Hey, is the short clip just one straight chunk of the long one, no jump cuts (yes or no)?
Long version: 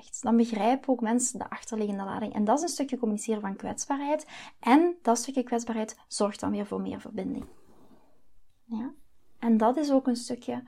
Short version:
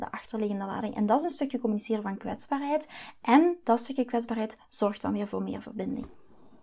yes